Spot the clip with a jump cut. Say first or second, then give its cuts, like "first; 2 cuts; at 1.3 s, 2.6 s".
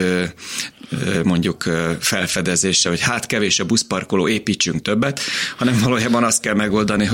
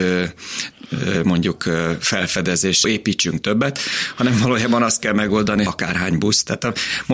second; 2 cuts; at 2.8 s, 5.7 s